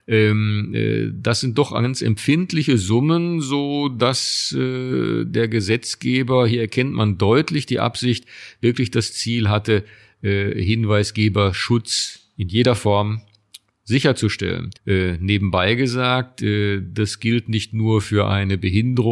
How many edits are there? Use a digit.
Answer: 1